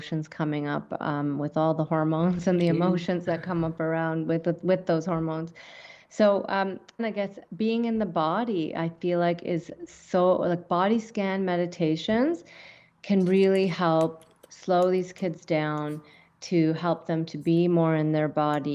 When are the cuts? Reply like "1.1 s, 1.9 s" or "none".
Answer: 7.0 s